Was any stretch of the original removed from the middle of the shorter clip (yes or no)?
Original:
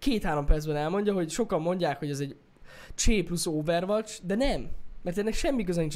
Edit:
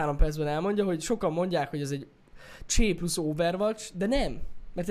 no